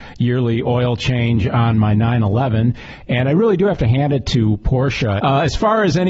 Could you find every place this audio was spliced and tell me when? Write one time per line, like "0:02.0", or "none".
0:05.2